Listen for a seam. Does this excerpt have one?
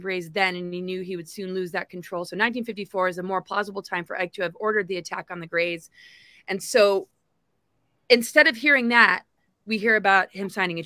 no; 0 cuts

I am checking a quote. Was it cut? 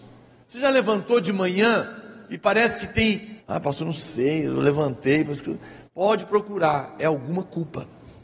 yes; 1 cut; at 3.4 s

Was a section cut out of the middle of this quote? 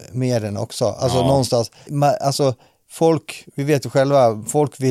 yes; 1 cut; at 1.9 s

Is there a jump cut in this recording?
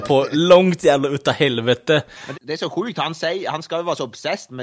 yes; 1 cut; at 2.3 s

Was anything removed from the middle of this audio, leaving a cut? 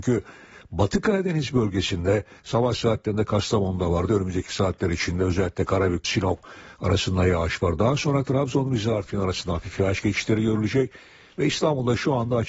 yes; 1 cut; at 6.0 s

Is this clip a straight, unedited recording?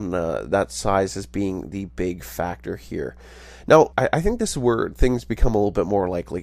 no; 1 cut; at 3.9 s

